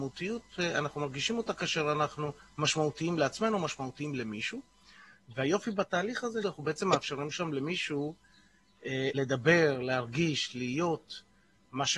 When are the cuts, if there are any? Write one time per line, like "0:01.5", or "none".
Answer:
0:06.4
0:09.1